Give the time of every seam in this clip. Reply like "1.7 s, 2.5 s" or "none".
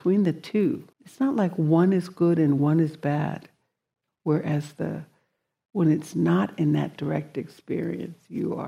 0.9 s, 4.1 s